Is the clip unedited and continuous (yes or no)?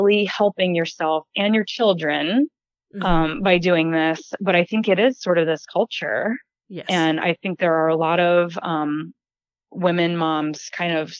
yes